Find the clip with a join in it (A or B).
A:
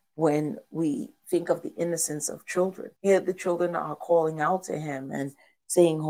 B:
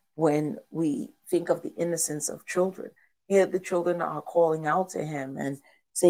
A